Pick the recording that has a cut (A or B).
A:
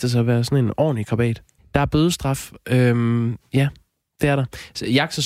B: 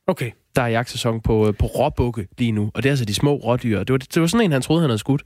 A